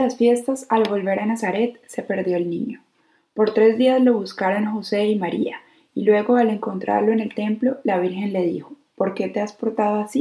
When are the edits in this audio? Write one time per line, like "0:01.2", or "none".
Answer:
none